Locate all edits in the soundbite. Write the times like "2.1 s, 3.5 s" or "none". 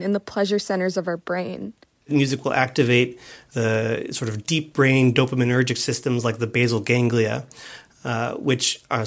none